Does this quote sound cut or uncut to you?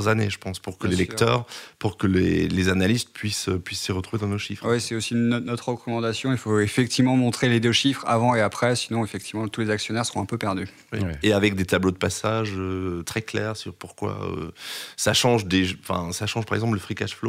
uncut